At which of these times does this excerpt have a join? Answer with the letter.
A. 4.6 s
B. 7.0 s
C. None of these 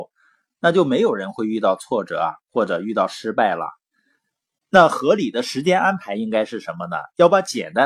A